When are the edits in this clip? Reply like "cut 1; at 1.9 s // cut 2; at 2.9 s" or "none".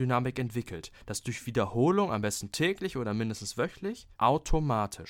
cut 1; at 4.2 s